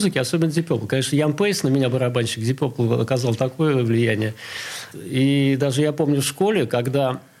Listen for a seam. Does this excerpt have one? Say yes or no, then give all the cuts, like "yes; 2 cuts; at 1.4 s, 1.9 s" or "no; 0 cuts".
yes; 1 cut; at 4.9 s